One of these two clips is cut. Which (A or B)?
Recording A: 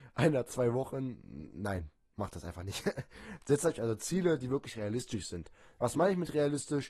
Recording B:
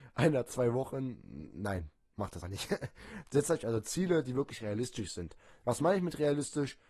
B